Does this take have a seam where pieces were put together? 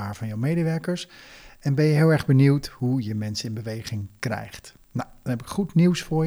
no; 0 cuts

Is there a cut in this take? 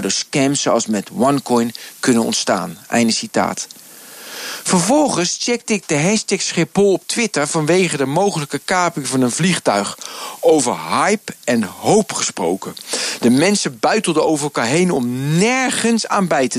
no; 0 cuts

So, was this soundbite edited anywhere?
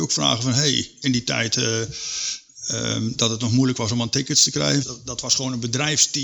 yes; 1 cut; at 4.8 s

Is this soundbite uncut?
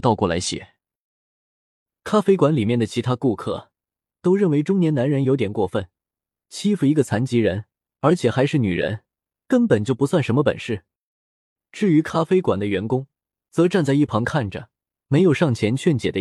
yes; 0 cuts

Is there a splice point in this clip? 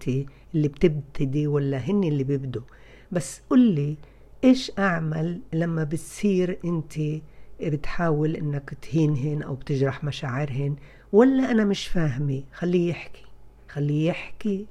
yes; 1 cut; at 13.6 s

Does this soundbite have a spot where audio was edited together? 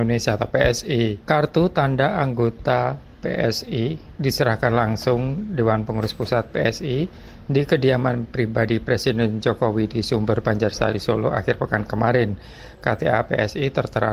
no; 0 cuts

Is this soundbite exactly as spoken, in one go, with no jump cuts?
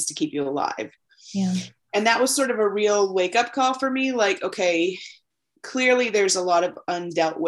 yes; 0 cuts

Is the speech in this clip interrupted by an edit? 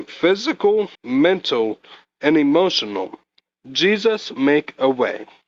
yes; 1 cut; at 0.9 s

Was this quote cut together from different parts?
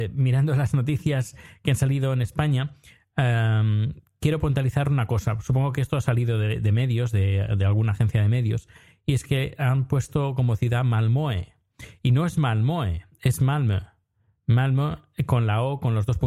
no; 0 cuts

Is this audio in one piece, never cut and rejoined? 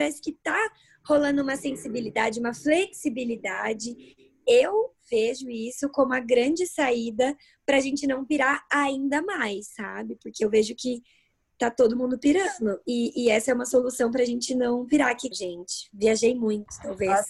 no; 1 cut; at 15.3 s

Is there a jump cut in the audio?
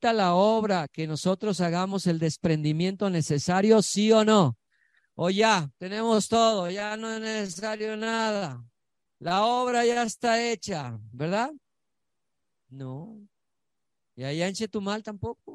no; 0 cuts

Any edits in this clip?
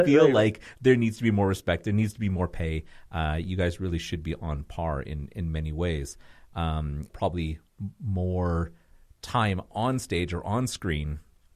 yes; 1 cut; at 7.1 s

